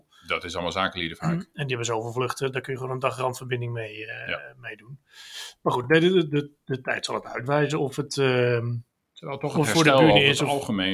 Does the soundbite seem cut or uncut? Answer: uncut